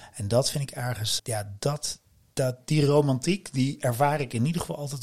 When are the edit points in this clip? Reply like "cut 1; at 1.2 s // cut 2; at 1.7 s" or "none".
cut 1; at 1.2 s